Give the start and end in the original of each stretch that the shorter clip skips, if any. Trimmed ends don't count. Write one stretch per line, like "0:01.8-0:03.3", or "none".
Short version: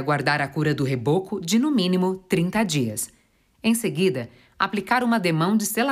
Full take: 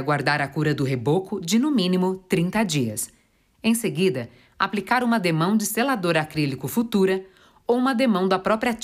none